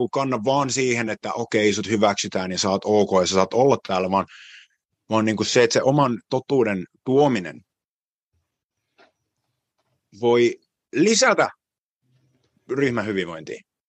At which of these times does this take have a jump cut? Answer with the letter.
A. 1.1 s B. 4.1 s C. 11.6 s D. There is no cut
D